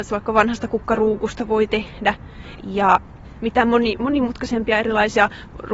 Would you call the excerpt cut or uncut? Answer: cut